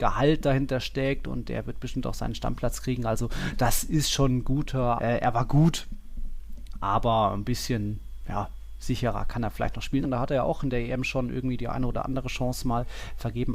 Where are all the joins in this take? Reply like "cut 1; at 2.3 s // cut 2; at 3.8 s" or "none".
cut 1; at 5.0 s // cut 2; at 10.0 s